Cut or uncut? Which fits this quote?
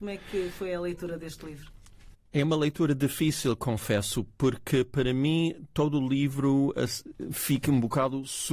uncut